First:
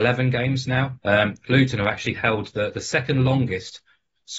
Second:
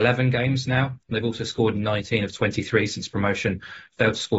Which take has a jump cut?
first; 1 cut; at 1.0 s

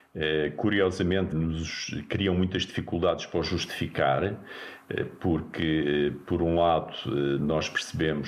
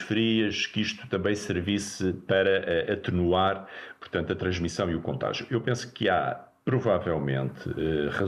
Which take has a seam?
first; 1 cut; at 1.3 s

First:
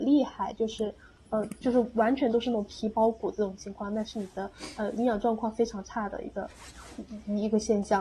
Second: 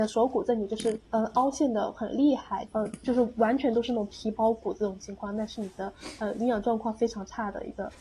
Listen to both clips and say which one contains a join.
second; 2 cuts; at 1.0 s, 2.7 s

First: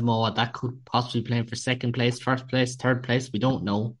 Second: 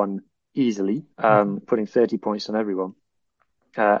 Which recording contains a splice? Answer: second; 1 cut; at 1.1 s

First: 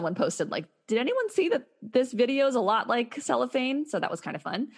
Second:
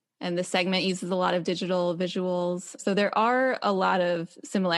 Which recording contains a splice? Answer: second; 1 cut; at 2.8 s

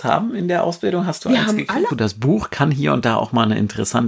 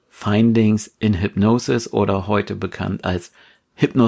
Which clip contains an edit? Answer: first; 1 cut; at 1.9 s

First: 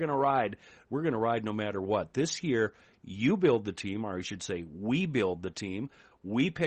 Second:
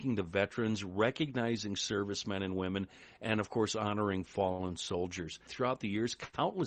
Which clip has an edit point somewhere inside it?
second; 1 cut; at 5.5 s

